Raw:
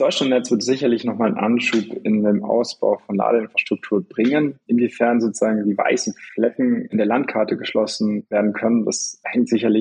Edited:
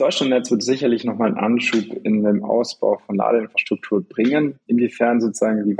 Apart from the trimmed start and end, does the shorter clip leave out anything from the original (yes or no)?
no